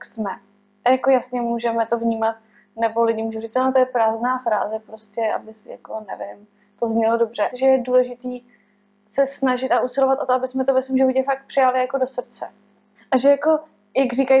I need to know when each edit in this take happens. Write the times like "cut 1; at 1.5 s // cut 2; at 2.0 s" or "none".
cut 1; at 7.5 s // cut 2; at 12.9 s